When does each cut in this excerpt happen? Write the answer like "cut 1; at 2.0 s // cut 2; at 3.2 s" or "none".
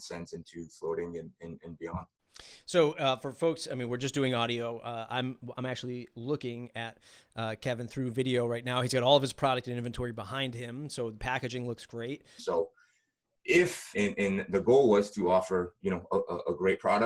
cut 1; at 12.4 s // cut 2; at 13.9 s